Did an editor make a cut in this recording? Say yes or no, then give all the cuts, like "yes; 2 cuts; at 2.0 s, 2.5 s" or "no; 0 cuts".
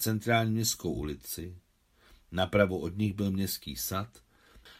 no; 0 cuts